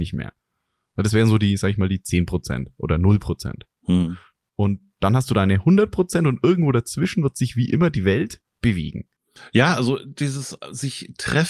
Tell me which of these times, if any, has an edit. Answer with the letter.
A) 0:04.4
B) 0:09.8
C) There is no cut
C